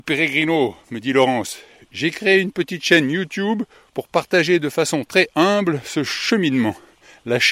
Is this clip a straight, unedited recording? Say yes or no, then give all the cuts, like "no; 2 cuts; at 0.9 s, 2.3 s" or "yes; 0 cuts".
yes; 0 cuts